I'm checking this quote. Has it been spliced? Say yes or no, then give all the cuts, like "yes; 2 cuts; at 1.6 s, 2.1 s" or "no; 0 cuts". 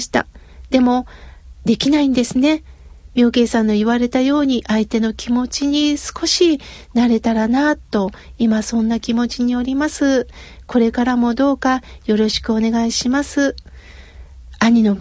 no; 0 cuts